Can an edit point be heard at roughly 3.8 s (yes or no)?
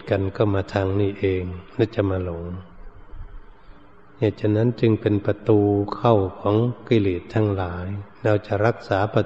no